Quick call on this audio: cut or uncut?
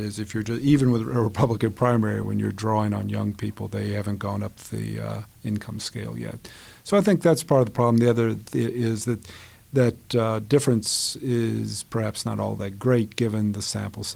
uncut